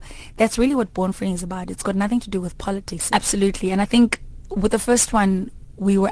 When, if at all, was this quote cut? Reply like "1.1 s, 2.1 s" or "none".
3.1 s